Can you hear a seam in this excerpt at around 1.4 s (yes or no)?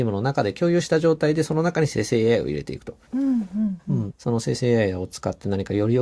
no